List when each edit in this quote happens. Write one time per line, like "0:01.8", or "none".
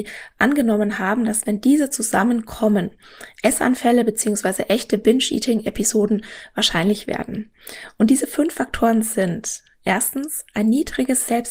none